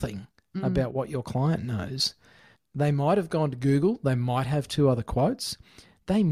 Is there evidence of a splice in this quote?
yes; 1 cut; at 2.5 s

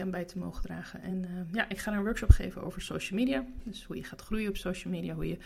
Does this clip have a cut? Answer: no; 0 cuts

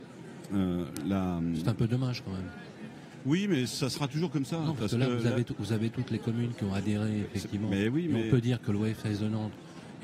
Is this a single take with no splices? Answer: yes; 0 cuts

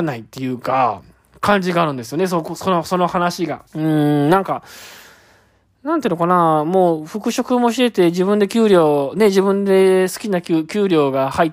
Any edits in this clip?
yes; 1 cut; at 3.7 s

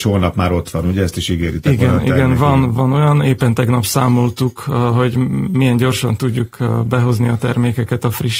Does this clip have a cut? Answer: no; 0 cuts

